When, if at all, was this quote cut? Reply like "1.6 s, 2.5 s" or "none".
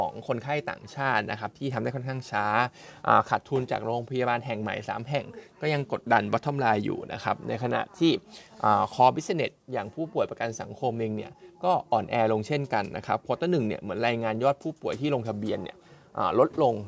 6.0 s